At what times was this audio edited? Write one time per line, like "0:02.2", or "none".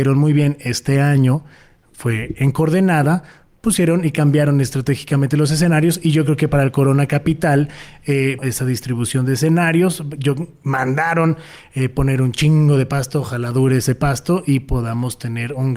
0:08.4